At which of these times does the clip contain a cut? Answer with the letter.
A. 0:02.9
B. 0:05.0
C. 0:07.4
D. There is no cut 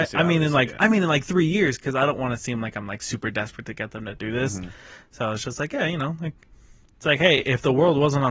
D